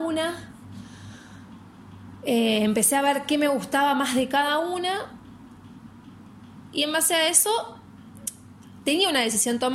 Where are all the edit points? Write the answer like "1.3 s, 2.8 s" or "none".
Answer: none